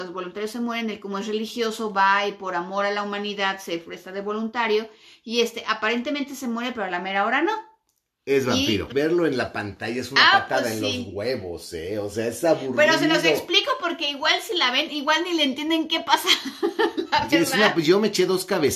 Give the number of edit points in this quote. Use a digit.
1